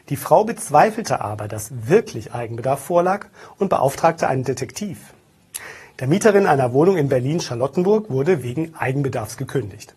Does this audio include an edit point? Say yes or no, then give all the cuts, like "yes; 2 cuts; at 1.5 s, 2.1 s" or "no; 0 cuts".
yes; 1 cut; at 5.9 s